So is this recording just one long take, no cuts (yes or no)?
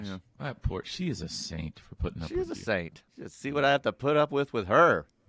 no